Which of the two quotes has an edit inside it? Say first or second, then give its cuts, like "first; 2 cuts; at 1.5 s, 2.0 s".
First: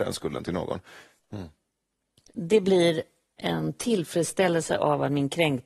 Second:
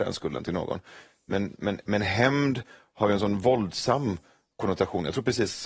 first; 1 cut; at 1.2 s